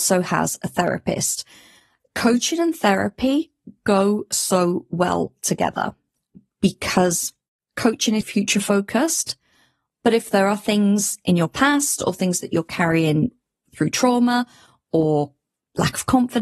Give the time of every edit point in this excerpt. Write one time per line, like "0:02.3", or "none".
0:08.2